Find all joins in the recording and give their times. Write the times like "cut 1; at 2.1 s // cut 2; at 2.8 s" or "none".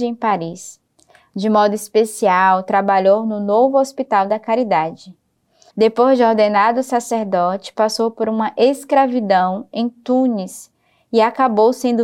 cut 1; at 5.7 s

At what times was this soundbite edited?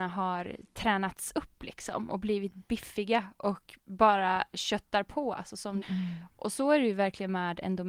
cut 1; at 5.8 s

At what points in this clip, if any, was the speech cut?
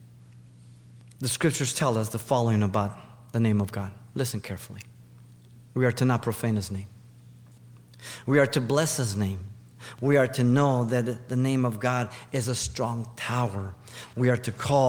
cut 1; at 9.9 s

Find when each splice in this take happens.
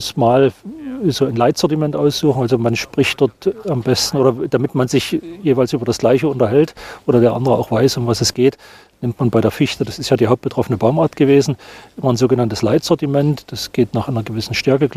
none

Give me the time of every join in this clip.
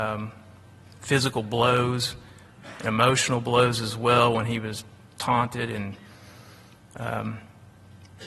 none

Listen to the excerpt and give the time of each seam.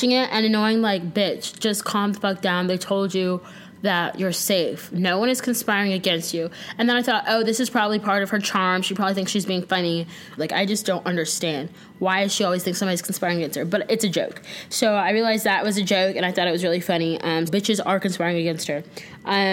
cut 1; at 10.4 s // cut 2; at 17.5 s

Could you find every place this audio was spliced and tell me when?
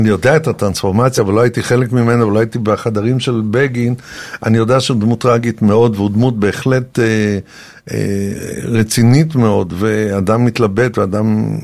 none

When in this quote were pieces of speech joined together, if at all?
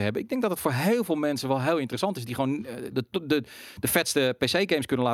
cut 1; at 2.9 s

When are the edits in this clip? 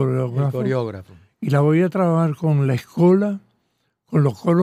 none

